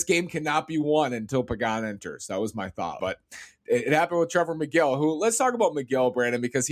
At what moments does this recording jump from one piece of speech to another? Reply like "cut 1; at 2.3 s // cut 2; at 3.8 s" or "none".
cut 1; at 3.0 s